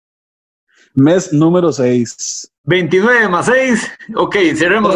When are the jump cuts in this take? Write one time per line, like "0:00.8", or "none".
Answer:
none

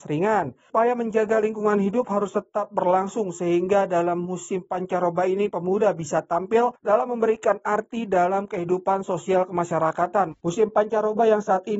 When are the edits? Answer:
0:10.3

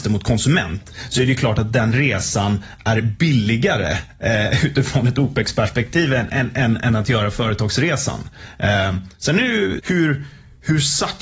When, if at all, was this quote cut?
0:09.8

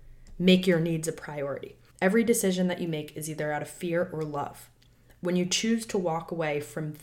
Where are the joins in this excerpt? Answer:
0:01.9

